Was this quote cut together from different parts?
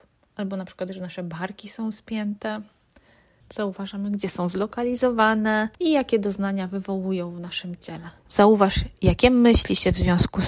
yes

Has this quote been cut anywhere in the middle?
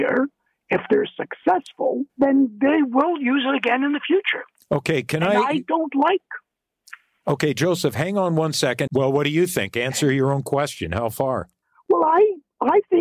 yes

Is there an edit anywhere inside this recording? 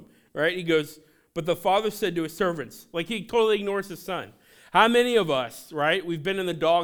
no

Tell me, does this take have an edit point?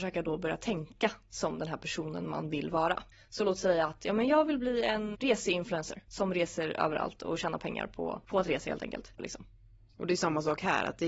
yes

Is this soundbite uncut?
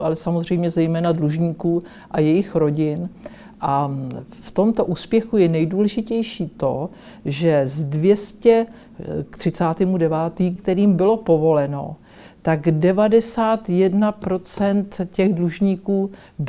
no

